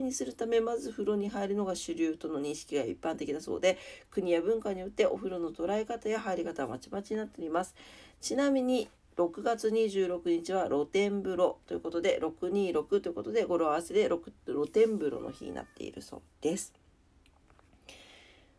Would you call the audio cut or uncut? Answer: uncut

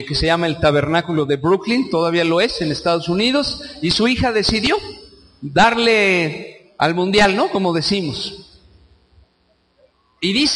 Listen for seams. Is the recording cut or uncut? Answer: uncut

